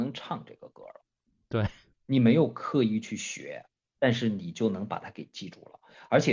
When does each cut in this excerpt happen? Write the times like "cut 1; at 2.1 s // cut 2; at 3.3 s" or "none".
cut 1; at 4.0 s